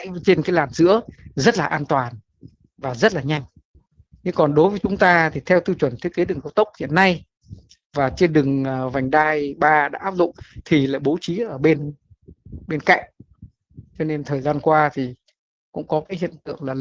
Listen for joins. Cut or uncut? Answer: uncut